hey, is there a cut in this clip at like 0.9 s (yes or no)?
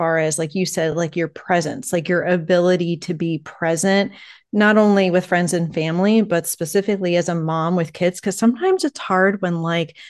no